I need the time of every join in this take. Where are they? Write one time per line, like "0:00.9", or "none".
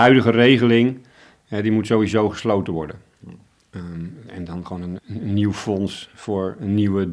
0:05.0

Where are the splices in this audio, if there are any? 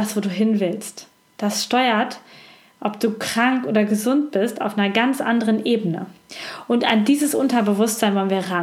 none

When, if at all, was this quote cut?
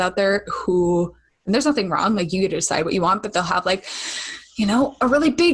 none

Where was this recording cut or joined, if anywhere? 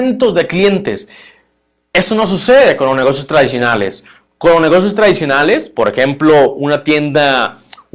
none

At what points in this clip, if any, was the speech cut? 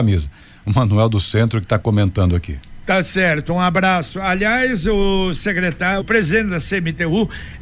0:06.0

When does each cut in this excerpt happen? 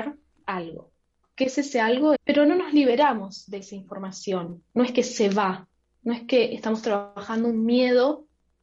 0:02.1

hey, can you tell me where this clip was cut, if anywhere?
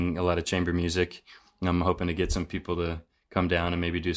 none

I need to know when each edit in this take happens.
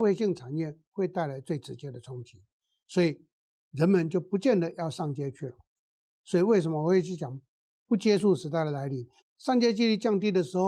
0:09.2

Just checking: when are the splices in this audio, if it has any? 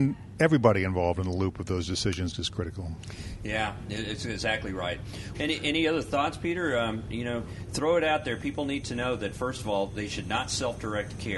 0:02.3
0:05.3

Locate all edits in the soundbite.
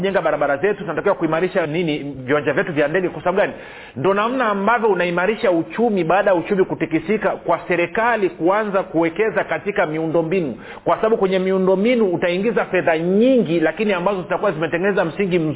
0:01.6

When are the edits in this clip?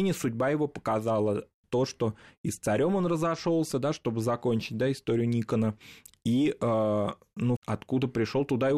0:07.6

